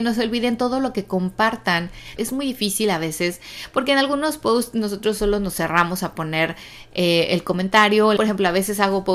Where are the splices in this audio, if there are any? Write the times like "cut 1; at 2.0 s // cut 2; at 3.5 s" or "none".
cut 1; at 2.2 s // cut 2; at 8.2 s